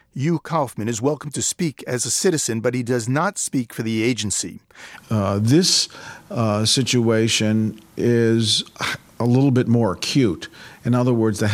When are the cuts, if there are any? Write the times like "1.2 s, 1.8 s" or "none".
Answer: 5.0 s